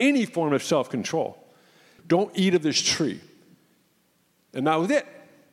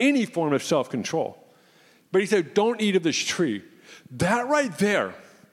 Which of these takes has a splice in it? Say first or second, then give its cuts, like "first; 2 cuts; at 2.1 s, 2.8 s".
first; 1 cut; at 2.0 s